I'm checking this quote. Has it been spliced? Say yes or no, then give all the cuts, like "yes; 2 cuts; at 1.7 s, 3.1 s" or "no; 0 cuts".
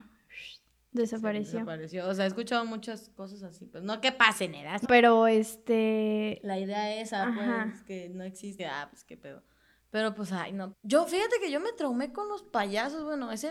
yes; 3 cuts; at 4.8 s, 8.6 s, 10.7 s